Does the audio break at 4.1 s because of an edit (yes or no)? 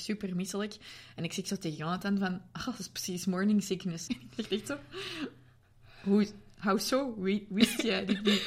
yes